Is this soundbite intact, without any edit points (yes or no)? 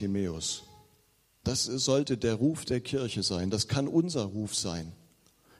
no